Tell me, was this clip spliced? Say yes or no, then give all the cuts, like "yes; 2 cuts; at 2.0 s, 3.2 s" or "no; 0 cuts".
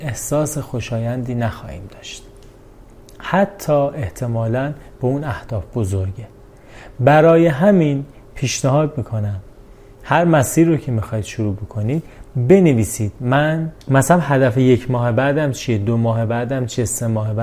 yes; 1 cut; at 13.8 s